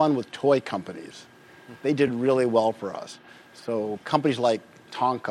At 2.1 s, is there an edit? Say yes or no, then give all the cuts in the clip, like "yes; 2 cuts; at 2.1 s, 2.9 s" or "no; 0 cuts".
no; 0 cuts